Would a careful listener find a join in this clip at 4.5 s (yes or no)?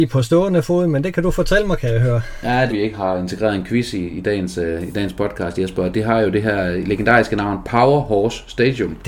no